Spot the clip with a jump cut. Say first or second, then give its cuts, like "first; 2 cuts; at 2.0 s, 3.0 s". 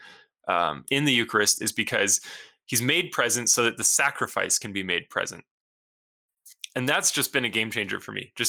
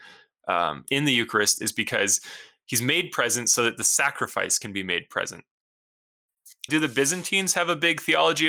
second; 1 cut; at 6.7 s